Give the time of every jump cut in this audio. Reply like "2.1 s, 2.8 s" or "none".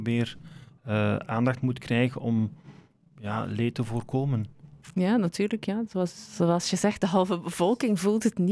none